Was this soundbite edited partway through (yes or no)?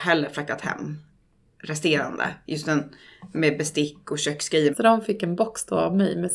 yes